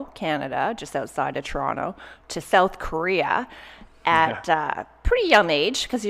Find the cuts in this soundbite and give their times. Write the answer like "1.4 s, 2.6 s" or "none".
none